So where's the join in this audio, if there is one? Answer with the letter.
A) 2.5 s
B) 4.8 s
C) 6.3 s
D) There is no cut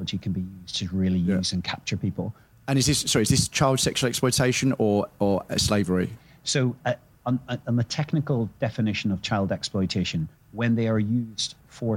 A